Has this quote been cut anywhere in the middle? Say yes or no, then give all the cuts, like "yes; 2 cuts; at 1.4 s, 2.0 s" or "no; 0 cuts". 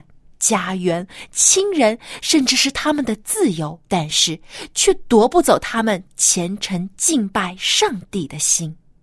yes; 1 cut; at 3.8 s